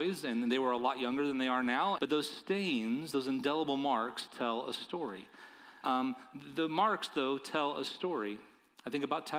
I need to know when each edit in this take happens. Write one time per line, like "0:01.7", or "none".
0:02.0
0:05.8